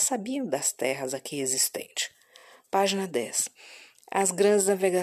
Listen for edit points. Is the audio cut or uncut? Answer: uncut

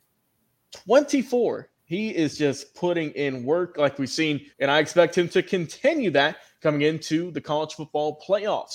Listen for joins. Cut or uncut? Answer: cut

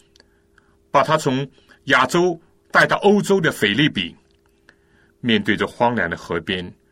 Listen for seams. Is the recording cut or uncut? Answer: uncut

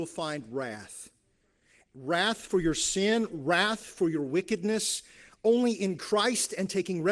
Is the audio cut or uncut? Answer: cut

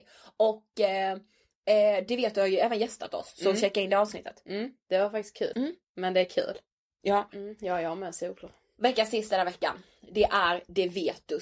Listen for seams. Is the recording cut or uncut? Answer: cut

